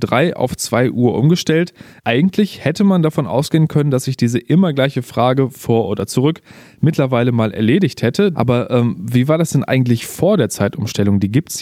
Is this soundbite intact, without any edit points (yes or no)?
no